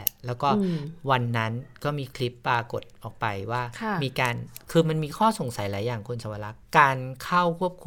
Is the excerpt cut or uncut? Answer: uncut